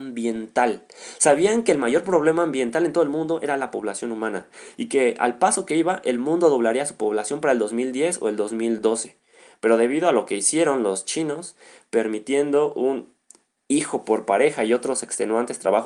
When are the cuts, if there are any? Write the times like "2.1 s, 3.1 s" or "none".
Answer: none